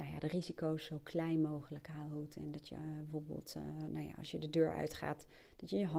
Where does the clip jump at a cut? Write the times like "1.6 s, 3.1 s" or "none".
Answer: none